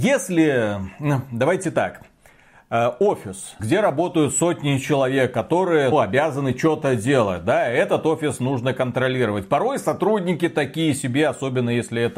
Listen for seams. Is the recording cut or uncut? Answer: cut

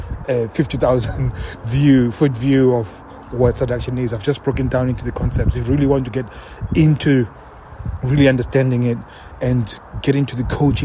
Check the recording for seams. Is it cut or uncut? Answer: uncut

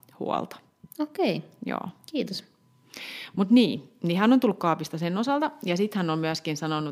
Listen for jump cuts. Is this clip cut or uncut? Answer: uncut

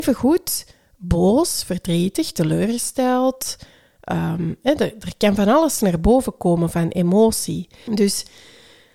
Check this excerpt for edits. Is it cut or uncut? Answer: cut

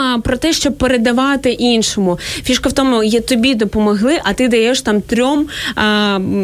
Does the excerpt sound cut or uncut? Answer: uncut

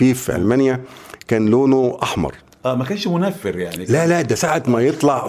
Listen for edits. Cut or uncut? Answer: uncut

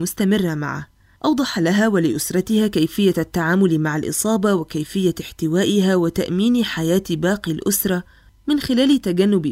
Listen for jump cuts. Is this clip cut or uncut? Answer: uncut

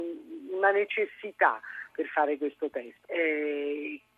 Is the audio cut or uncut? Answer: cut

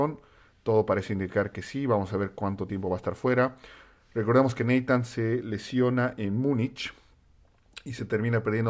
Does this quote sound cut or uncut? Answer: uncut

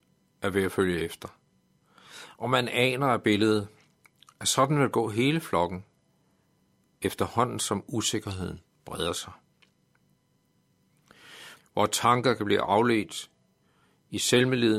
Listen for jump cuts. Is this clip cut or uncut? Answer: cut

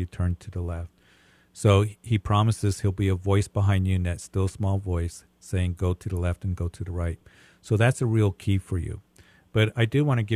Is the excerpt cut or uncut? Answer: uncut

